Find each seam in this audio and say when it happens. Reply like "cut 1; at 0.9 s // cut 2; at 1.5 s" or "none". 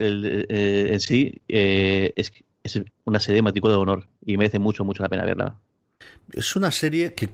cut 1; at 2.9 s